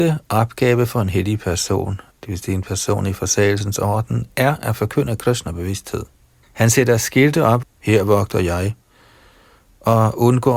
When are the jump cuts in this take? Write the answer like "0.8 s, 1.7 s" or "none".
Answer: 2.1 s, 6.4 s, 7.6 s